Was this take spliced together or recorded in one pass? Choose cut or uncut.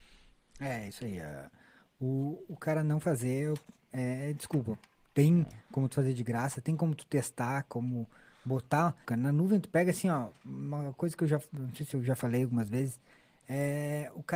cut